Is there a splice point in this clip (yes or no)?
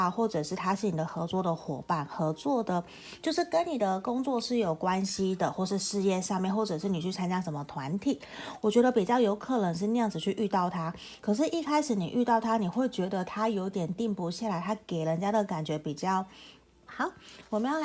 yes